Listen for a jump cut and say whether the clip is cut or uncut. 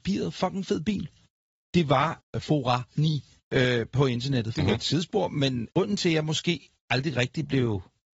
cut